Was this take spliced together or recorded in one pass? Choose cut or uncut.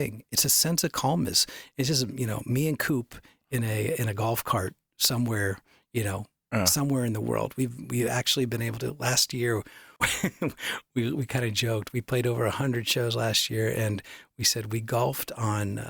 uncut